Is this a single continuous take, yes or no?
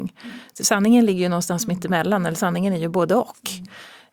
yes